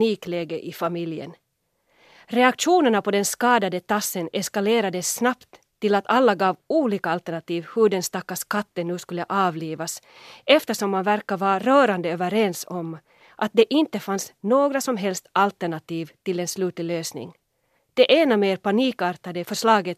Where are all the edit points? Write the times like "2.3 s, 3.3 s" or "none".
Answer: 17.8 s